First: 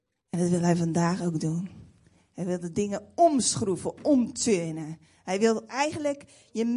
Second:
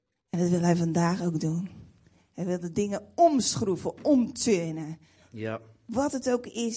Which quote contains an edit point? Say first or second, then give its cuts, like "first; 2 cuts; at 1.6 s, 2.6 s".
second; 1 cut; at 5.2 s